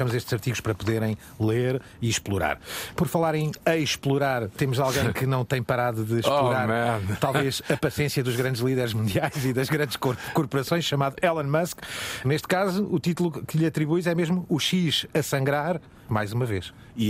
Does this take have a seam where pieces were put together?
yes; 1 cut; at 16.1 s

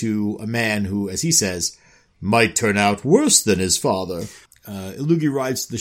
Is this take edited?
yes; 1 cut; at 4.5 s

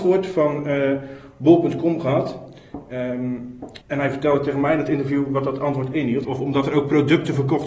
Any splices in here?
yes; 2 cuts; at 3.8 s, 6.2 s

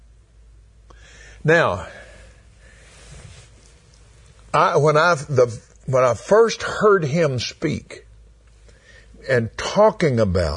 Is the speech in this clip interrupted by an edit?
no; 0 cuts

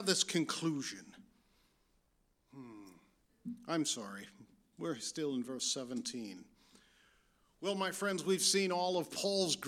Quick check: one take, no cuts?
yes; 0 cuts

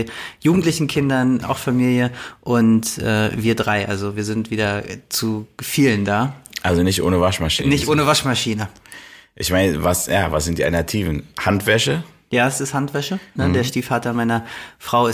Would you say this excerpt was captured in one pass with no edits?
no; 2 cuts; at 1.4 s, 13.4 s

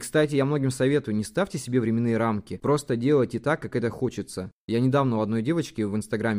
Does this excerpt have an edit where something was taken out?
no; 0 cuts

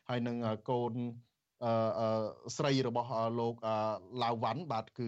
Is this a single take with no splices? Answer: yes; 0 cuts

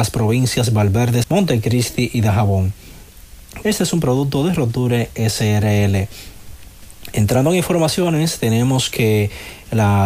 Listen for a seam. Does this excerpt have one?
yes; 2 cuts; at 1.2 s, 3.6 s

